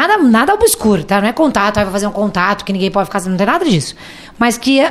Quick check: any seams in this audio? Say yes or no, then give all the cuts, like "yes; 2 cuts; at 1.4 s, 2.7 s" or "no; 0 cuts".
no; 0 cuts